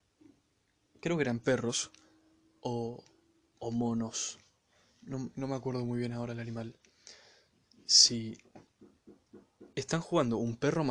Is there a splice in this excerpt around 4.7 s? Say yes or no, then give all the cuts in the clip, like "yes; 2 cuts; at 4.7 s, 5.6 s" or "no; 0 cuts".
no; 0 cuts